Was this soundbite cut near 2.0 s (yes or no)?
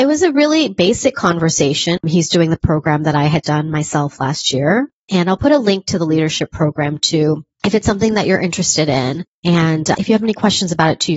yes